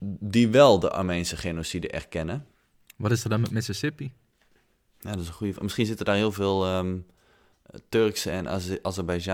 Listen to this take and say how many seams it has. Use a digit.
0